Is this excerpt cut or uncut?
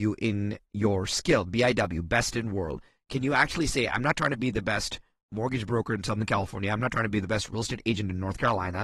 uncut